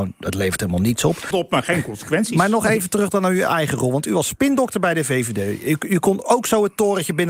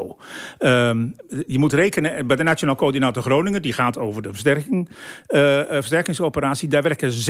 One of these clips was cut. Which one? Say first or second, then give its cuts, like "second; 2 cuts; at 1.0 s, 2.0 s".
first; 1 cut; at 1.3 s